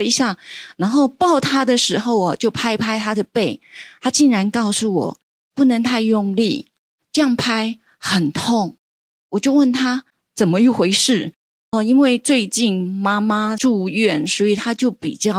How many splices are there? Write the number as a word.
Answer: one